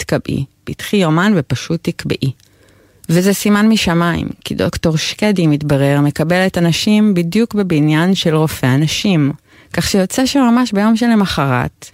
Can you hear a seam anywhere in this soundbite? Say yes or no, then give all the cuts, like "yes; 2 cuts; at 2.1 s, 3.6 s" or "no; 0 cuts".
no; 0 cuts